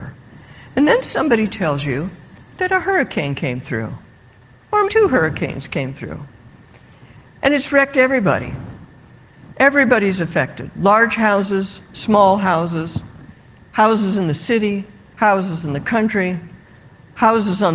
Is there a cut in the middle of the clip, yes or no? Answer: yes